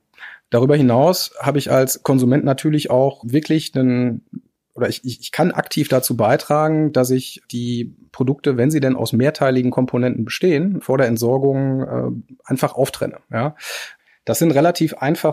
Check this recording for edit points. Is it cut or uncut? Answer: cut